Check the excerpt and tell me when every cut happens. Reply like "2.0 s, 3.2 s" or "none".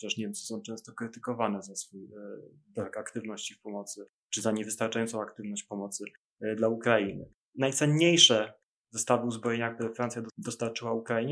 none